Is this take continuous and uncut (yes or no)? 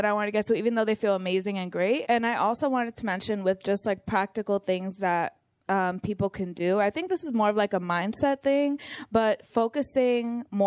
no